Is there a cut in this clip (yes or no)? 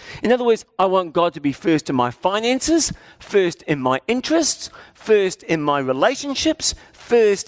no